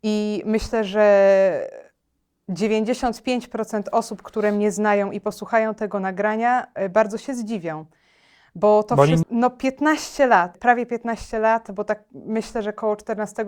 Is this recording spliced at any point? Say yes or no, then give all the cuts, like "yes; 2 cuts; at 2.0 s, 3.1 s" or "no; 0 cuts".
yes; 2 cuts; at 9.2 s, 10.5 s